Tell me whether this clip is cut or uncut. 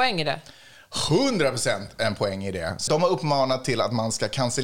cut